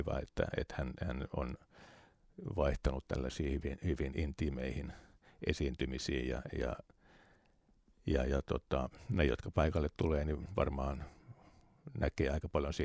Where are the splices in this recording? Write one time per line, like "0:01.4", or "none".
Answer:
none